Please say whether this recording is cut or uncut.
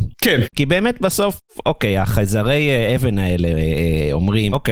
uncut